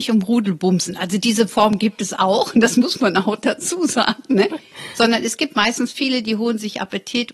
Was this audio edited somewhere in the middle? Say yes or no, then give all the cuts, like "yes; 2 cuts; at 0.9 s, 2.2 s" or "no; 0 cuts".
no; 0 cuts